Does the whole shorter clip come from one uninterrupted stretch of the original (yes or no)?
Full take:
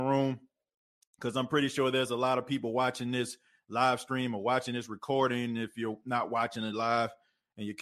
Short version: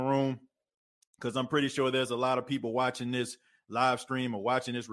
yes